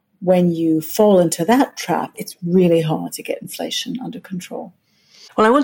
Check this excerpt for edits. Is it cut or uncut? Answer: cut